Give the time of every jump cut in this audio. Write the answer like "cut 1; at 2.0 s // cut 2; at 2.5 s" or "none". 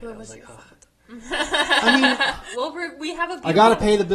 cut 1; at 2.5 s